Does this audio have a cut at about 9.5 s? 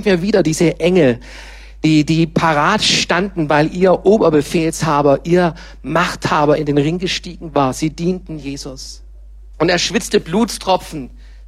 yes; 1 cut; at 9.5 s

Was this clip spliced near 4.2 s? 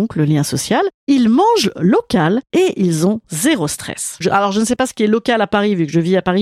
yes; 1 cut; at 4.2 s

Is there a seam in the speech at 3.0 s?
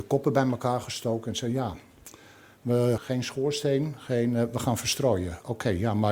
yes; 1 cut; at 3.0 s

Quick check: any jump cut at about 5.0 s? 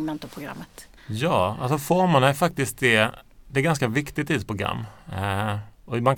no; 1 cut; at 1.0 s

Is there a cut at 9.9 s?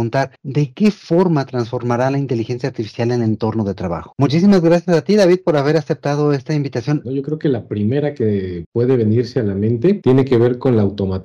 no; 2 cuts; at 4.1 s, 7.0 s

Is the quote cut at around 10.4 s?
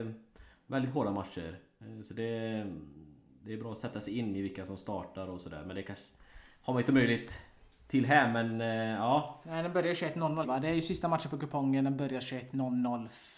yes; 1 cut; at 10.4 s

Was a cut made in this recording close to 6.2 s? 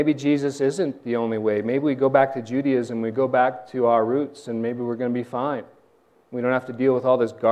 no; 0 cuts

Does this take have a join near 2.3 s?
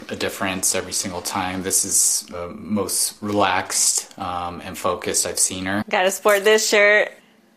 no; 1 cut; at 5.8 s

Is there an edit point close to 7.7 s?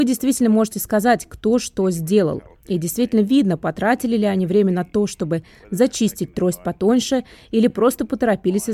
no; 0 cuts

